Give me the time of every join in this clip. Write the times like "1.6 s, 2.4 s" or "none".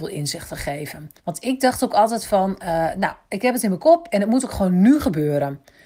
1.2 s